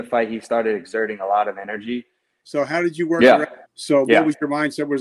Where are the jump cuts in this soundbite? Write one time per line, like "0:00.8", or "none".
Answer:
0:02.4
0:03.6